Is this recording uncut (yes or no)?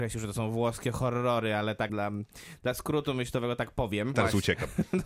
no